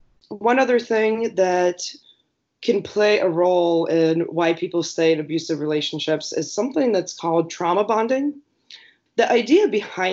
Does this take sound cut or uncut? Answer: cut